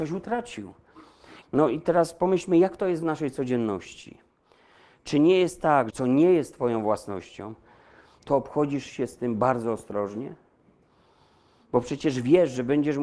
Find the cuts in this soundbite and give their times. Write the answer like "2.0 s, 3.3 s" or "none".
1.4 s, 5.9 s